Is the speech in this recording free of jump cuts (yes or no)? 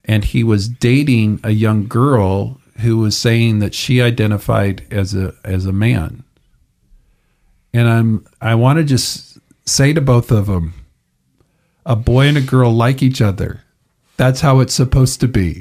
yes